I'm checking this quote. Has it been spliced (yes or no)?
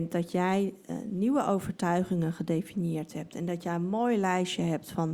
no